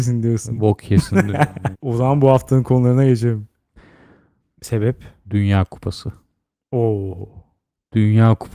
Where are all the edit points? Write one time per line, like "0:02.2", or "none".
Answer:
0:01.7
0:04.4